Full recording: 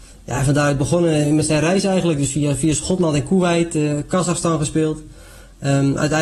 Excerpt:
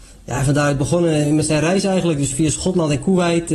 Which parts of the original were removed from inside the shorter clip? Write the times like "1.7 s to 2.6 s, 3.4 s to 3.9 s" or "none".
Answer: 2.3 s to 2.6 s